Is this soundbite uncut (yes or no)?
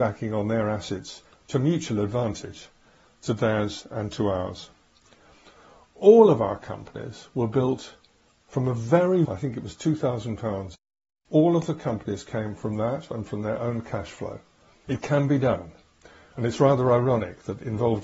no